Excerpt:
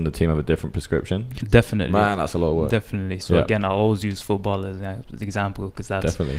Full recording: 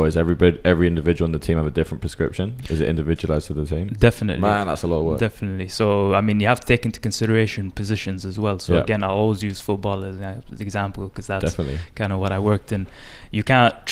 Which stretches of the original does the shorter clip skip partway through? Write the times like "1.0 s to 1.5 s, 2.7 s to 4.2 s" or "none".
2.7 s to 3.9 s, 5.7 s to 8.6 s